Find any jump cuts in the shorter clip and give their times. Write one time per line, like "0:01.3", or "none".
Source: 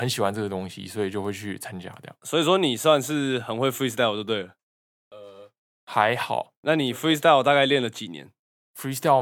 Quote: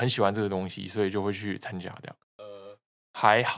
0:02.2